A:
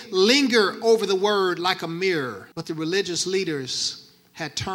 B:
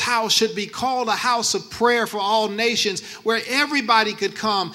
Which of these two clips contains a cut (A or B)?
A